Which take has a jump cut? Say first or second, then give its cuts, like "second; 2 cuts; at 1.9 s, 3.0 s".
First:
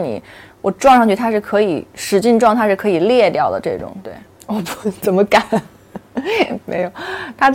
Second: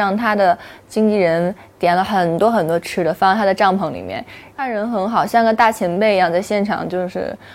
second; 1 cut; at 4.5 s